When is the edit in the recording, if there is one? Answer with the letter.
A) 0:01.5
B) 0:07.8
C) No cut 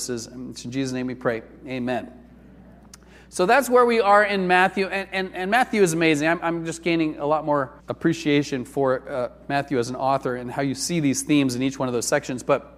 B